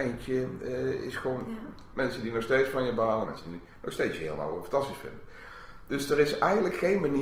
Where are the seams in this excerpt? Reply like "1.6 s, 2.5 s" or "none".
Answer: 1.9 s, 3.3 s